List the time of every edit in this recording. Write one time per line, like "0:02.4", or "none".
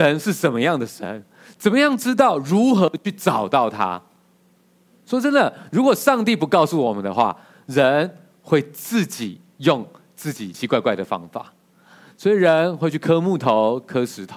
0:10.5